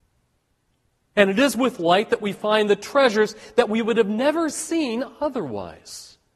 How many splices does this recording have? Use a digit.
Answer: 1